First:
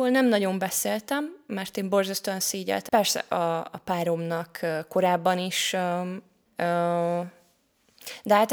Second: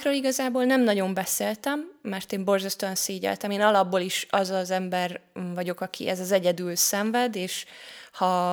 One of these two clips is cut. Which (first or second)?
first